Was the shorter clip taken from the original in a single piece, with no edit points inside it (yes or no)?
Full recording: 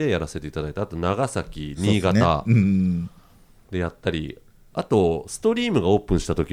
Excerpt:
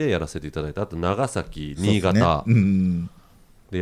yes